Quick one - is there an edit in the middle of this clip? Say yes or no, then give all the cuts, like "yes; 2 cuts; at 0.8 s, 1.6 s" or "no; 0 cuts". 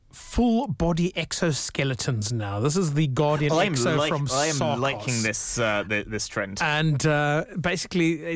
no; 0 cuts